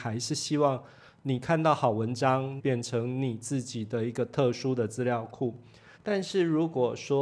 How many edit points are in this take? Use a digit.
2